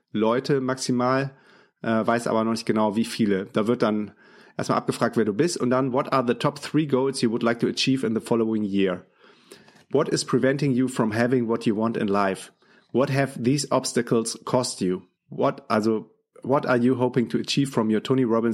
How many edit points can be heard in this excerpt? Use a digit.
1